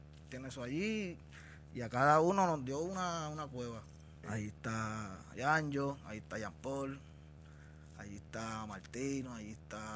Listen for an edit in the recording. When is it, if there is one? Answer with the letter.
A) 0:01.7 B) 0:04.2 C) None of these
B